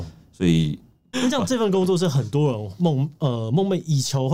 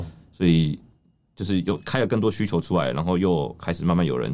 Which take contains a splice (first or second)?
first